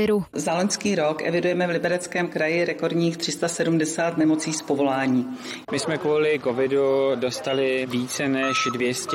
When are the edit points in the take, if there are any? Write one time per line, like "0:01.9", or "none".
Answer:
0:05.6